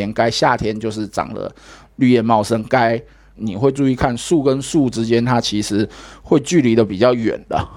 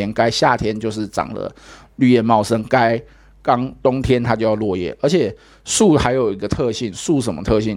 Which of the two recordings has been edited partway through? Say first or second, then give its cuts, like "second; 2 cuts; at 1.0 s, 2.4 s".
first; 1 cut; at 3.4 s